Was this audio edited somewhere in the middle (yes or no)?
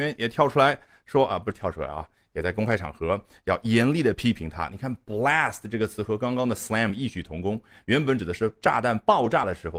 no